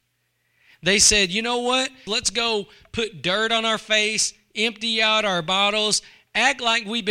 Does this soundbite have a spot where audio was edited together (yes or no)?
yes